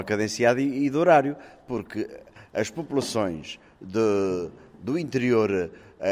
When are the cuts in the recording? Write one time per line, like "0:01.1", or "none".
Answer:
none